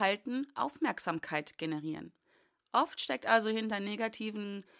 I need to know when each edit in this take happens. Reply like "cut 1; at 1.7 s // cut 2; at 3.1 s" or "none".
none